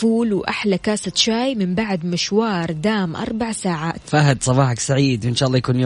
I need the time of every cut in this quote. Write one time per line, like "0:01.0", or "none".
0:04.0